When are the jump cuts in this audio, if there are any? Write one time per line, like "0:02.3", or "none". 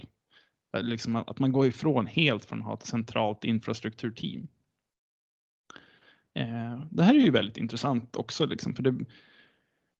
none